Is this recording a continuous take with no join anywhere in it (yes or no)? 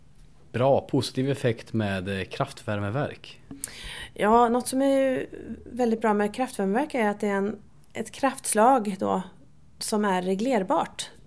yes